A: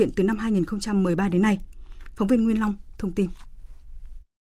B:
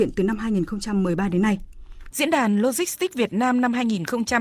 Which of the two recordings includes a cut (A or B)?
B